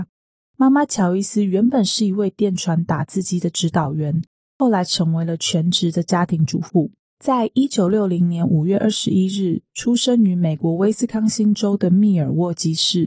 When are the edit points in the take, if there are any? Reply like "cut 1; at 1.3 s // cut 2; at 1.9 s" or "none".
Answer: cut 1; at 7.2 s